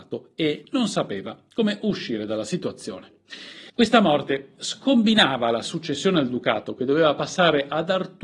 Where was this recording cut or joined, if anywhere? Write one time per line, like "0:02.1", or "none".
0:03.7